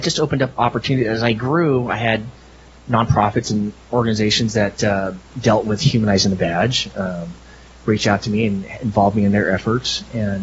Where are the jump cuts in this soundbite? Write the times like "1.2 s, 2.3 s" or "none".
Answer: 5.3 s